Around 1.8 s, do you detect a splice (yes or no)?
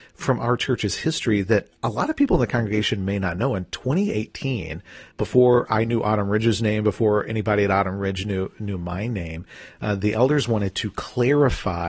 yes